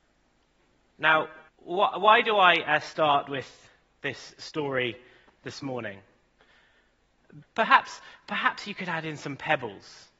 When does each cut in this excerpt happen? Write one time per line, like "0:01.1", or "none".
0:01.5
0:07.4